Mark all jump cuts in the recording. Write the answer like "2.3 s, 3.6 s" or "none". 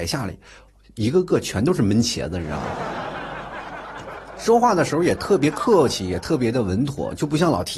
none